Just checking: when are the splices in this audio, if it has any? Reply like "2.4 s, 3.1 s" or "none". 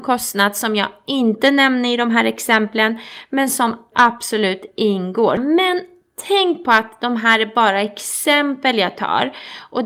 3.9 s, 5.4 s